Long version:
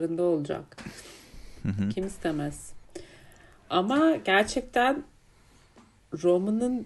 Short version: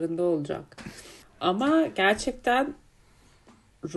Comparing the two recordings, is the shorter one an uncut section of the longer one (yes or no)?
no